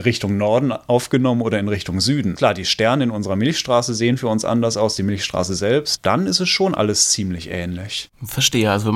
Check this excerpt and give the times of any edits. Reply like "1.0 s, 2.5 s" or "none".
2.4 s, 6.0 s

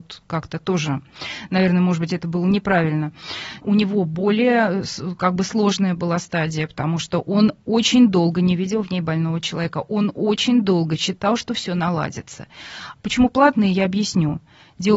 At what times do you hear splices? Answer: 3.6 s, 13.0 s

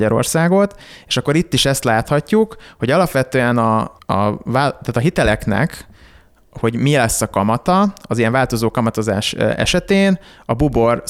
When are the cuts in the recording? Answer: 4.0 s

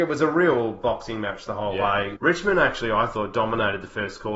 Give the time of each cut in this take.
2.2 s

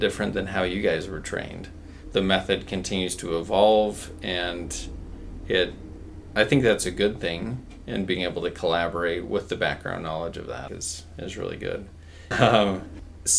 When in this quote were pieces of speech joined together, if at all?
10.7 s, 12.3 s

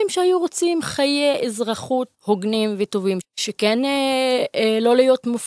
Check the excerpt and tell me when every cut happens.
2.1 s, 3.2 s

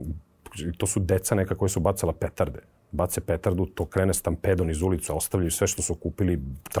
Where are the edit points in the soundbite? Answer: 5.1 s

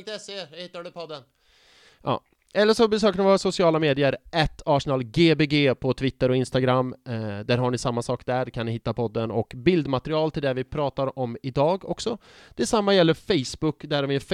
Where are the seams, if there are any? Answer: none

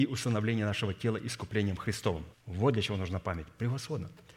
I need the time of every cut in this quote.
2.3 s

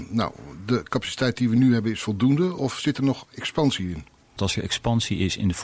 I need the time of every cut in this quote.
4.4 s

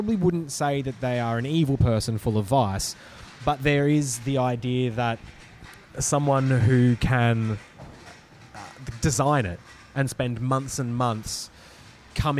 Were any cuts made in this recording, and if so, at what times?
none

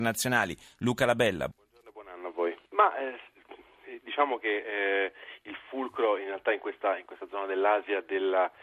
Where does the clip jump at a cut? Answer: 1.5 s, 2.7 s

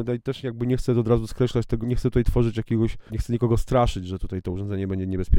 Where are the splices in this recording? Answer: 1.8 s, 3.1 s

